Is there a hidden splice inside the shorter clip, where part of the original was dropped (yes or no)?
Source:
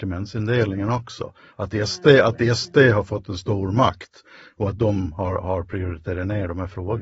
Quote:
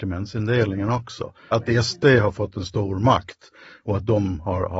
yes